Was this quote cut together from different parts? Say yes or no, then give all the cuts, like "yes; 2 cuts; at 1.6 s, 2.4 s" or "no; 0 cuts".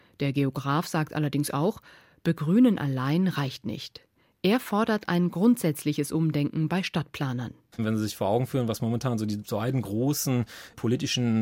no; 0 cuts